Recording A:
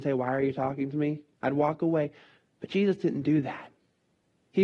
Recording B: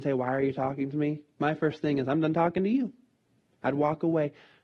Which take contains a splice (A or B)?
A